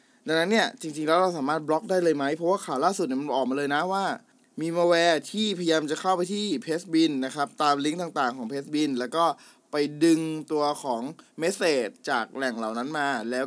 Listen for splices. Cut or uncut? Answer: uncut